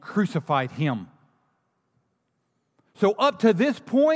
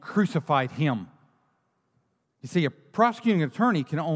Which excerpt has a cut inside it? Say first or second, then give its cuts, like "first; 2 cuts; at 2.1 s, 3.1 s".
second; 1 cut; at 2.2 s